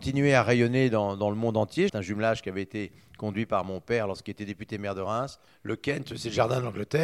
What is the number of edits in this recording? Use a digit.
2